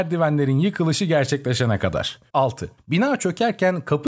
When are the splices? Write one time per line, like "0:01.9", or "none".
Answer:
0:02.3